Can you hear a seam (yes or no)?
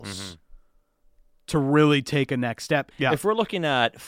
yes